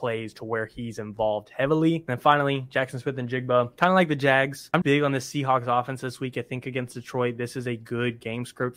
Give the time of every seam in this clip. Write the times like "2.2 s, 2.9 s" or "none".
4.8 s